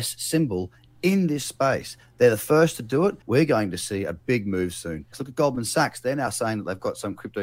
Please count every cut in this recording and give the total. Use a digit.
2